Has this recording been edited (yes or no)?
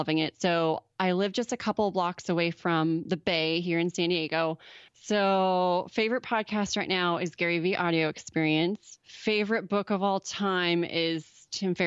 yes